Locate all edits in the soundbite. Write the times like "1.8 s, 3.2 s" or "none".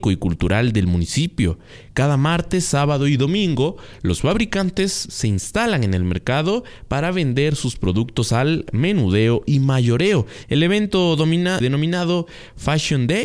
10.4 s, 11.6 s